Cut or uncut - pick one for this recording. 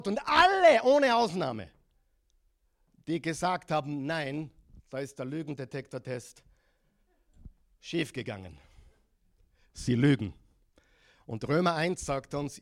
uncut